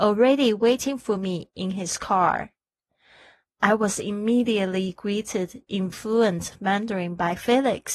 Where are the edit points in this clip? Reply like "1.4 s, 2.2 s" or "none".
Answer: 5.9 s